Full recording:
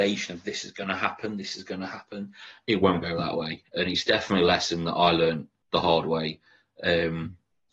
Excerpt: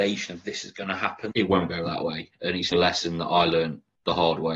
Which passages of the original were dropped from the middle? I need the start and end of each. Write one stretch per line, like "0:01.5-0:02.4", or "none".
0:01.3-0:02.6
0:04.0-0:04.4